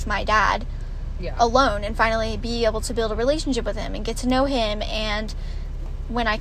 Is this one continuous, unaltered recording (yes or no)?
yes